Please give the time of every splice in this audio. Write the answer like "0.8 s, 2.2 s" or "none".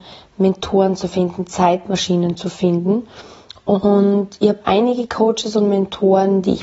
none